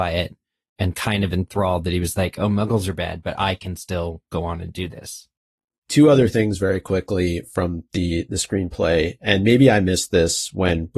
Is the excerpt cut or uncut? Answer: uncut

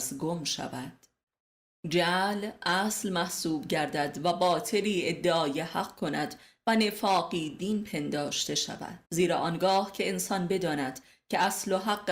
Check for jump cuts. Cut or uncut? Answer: cut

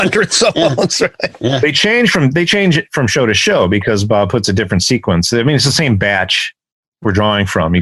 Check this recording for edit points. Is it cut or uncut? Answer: uncut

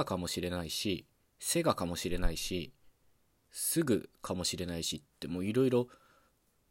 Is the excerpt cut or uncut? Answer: uncut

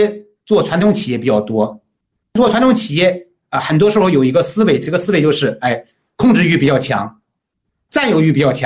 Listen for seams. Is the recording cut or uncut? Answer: uncut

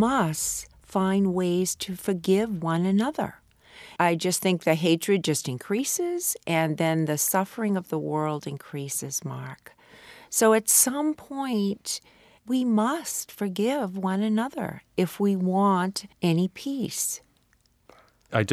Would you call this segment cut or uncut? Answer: cut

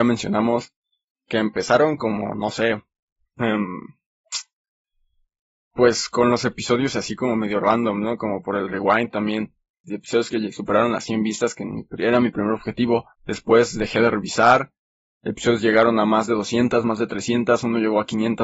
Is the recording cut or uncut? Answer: cut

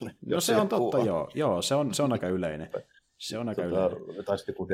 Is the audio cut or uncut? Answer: uncut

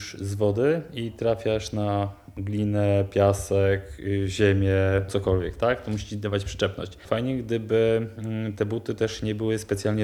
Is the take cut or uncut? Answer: cut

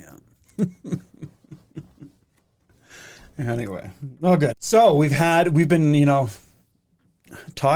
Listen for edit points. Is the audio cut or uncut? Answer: cut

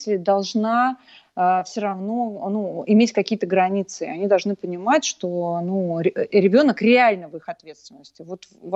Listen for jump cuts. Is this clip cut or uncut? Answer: uncut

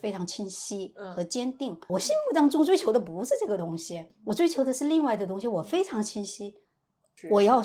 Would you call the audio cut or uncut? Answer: cut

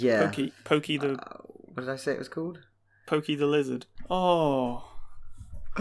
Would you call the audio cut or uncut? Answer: cut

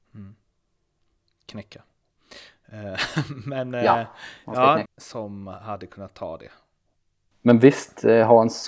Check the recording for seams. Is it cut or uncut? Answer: cut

